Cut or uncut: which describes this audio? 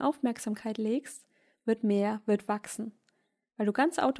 uncut